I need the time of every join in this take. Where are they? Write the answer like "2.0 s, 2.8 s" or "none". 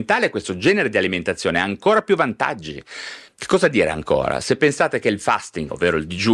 3.3 s